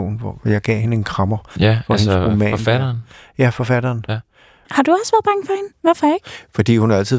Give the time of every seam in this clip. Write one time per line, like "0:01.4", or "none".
0:04.6
0:05.7